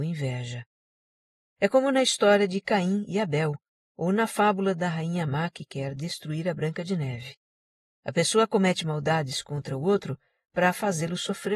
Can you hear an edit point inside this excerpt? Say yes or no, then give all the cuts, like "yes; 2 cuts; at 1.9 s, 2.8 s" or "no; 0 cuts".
no; 0 cuts